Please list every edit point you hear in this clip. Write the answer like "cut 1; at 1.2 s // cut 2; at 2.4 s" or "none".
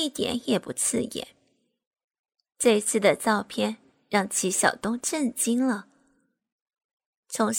none